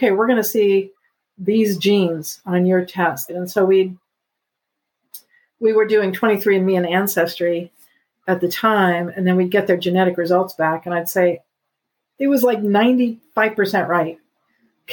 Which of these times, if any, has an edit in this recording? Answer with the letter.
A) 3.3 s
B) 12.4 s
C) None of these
A